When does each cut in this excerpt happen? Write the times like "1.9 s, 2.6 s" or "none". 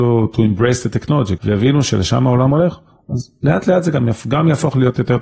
1.4 s